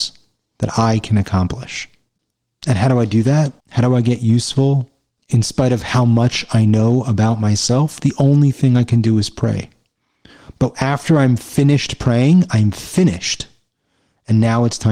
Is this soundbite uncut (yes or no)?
no